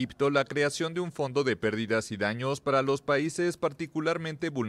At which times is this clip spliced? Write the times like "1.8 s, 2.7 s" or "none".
none